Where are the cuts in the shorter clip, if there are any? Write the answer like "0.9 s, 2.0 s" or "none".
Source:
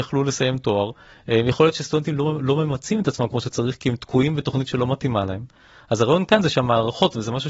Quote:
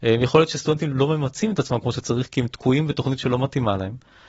0.9 s